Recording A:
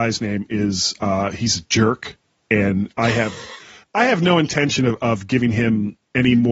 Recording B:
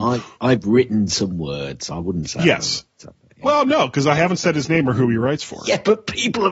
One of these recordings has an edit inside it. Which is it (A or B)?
B